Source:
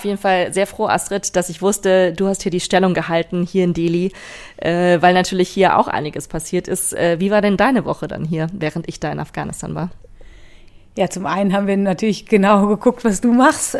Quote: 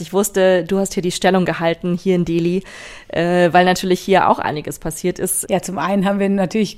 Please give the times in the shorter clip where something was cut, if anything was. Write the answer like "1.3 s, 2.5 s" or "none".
5.4 s